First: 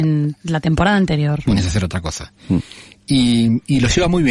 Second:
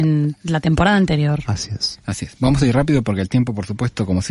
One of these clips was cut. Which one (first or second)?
first